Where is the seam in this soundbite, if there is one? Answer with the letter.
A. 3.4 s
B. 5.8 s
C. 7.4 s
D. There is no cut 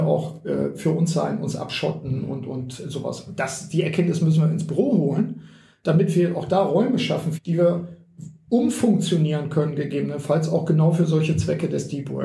C